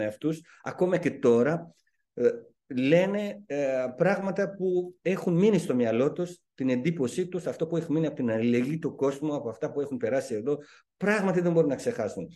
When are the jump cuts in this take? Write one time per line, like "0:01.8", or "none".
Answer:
none